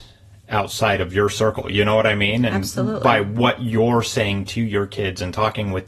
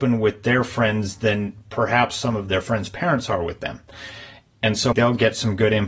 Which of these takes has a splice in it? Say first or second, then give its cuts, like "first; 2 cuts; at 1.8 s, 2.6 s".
second; 1 cut; at 4.9 s